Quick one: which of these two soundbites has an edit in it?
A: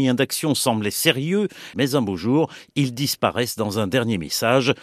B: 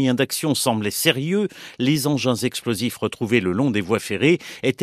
A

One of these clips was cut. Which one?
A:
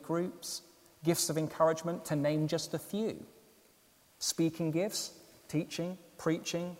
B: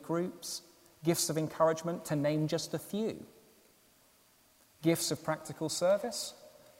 A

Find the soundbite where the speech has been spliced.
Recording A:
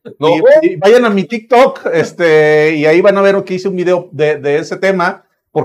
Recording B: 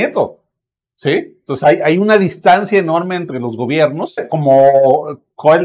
B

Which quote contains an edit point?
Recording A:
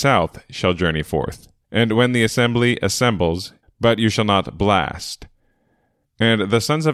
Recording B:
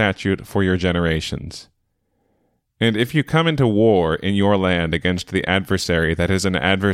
A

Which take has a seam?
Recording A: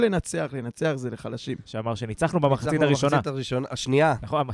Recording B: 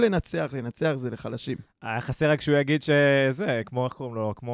A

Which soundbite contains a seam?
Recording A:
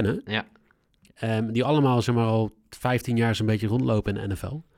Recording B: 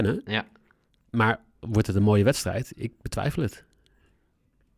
B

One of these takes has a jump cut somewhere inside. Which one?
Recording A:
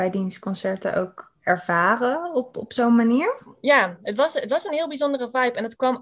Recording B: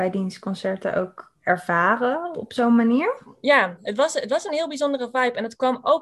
B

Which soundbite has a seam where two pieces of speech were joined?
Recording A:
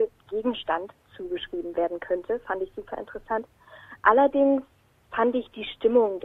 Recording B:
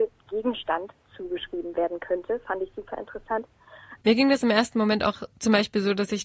B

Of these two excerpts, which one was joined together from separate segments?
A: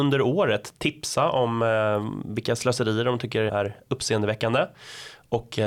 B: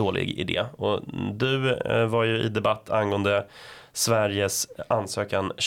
A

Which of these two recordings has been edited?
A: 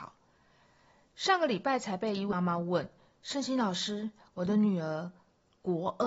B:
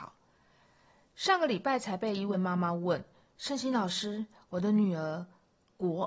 A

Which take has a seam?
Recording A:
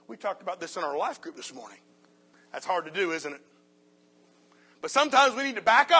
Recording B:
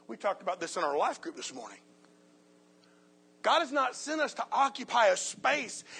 A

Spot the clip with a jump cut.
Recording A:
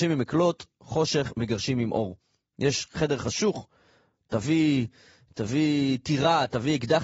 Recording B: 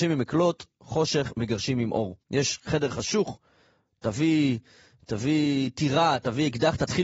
B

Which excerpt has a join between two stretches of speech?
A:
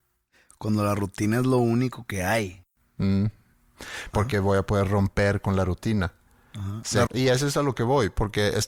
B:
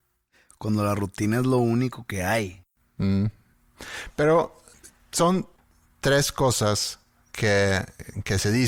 A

